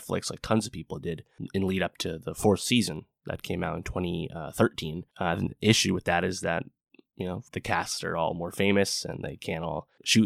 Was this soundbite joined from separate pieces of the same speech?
yes; 2 cuts; at 5.1 s, 7.5 s

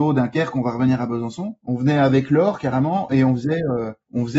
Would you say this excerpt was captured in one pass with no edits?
no; 1 cut; at 1.6 s

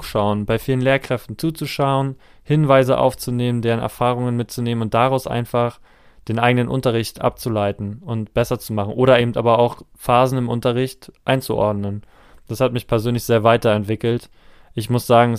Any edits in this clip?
no; 0 cuts

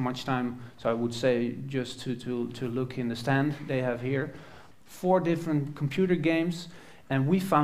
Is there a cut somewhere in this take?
yes; 1 cut; at 4.7 s

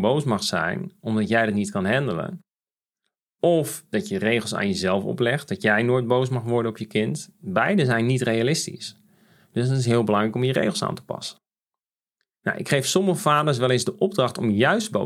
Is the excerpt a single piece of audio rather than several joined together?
yes; 0 cuts

